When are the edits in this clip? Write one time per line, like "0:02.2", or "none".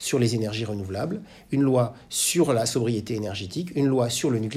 none